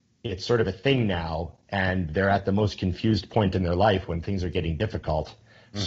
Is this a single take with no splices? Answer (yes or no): yes